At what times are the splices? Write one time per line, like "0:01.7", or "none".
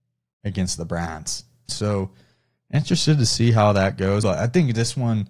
0:01.7
0:04.2